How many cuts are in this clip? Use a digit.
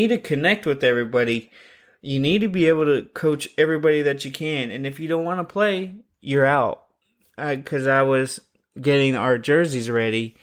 0